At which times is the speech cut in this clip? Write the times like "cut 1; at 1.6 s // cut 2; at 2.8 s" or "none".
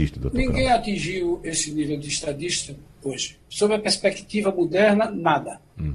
cut 1; at 3.4 s